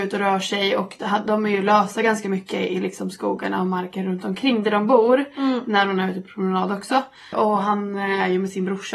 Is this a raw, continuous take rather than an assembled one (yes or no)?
no